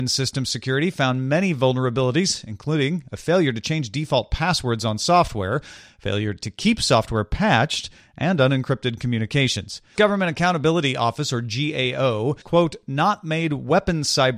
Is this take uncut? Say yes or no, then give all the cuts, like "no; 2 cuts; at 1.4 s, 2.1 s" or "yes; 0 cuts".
no; 2 cuts; at 10.0 s, 12.4 s